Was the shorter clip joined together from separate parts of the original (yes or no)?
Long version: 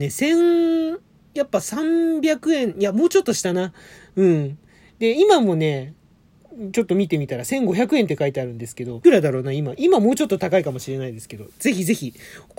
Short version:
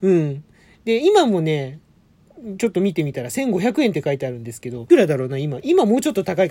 no